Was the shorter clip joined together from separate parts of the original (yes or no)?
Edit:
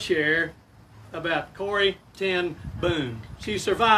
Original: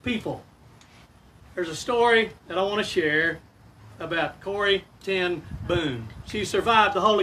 no